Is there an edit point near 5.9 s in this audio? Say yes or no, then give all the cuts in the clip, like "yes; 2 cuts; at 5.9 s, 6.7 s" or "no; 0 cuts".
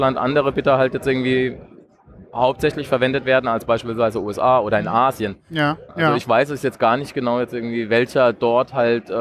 yes; 1 cut; at 5.9 s